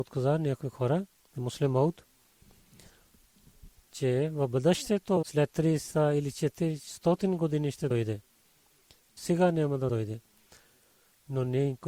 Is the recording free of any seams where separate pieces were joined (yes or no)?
no